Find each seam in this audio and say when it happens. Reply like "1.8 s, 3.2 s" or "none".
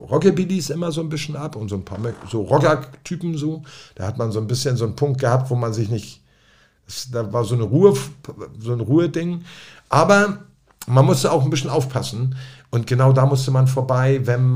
none